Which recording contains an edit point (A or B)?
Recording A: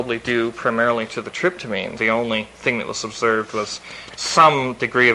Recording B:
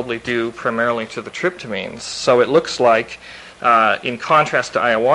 A